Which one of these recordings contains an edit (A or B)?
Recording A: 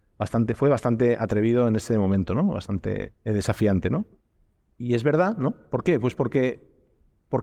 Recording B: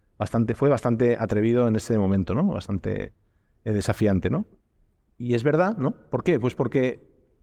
A